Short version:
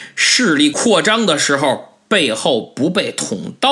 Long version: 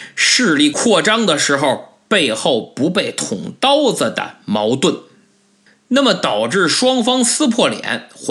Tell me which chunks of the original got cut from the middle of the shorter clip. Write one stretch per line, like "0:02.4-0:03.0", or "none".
none